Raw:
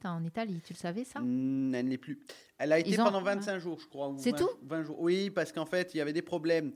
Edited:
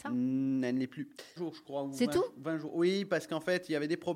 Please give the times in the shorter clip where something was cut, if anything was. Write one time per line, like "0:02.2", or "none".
0:01.4

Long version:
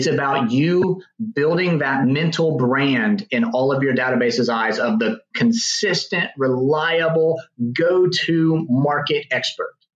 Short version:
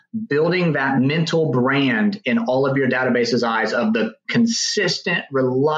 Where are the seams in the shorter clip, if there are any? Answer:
none

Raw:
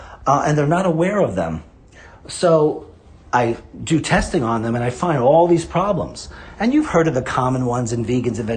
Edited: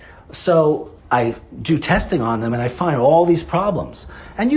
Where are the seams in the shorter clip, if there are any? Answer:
0:01.0

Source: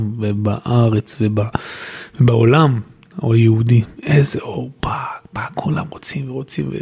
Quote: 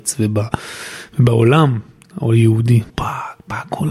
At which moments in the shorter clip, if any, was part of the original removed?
0:02.9

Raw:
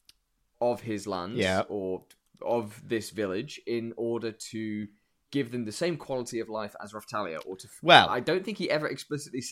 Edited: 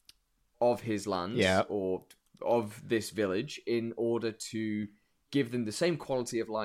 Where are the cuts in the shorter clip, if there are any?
none

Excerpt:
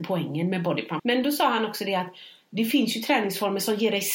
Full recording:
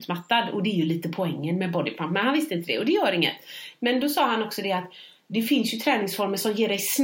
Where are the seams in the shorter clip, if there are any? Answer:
0:01.0

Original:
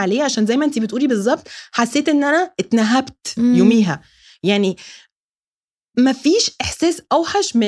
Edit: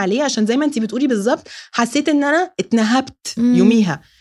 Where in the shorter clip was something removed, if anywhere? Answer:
none

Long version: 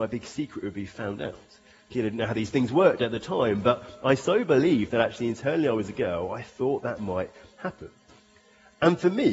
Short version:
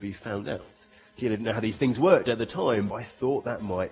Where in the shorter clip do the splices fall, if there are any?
0:02.9

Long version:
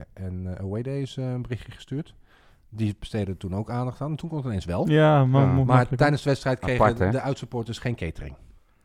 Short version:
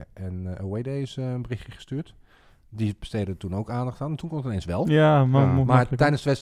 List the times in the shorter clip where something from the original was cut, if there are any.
none

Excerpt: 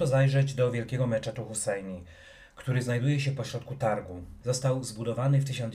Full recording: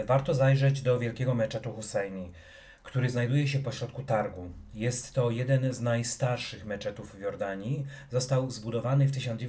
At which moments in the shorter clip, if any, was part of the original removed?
0:04.4

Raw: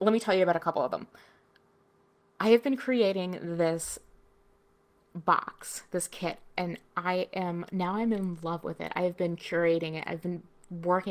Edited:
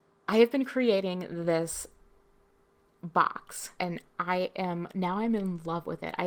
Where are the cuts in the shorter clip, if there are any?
0:03.8

